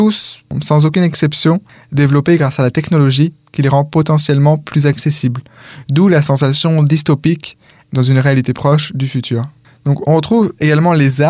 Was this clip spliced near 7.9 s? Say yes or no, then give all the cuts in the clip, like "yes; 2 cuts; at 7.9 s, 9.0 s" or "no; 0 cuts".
yes; 1 cut; at 7.9 s